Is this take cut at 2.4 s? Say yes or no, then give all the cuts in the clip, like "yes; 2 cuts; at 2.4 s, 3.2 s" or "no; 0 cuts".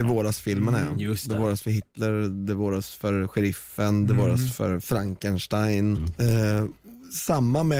no; 1 cut; at 6.0 s